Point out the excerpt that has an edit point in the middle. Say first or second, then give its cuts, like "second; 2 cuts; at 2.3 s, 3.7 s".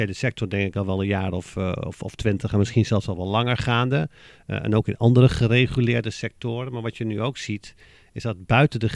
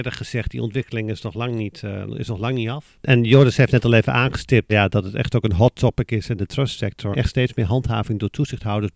second; 2 cuts; at 4.7 s, 7.1 s